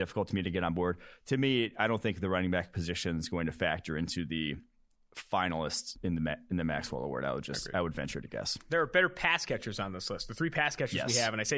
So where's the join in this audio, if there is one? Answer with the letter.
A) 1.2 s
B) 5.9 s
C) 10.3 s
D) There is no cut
B